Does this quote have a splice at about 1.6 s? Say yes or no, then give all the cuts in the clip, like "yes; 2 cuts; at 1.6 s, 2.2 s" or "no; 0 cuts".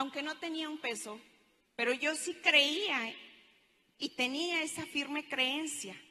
yes; 1 cut; at 1.6 s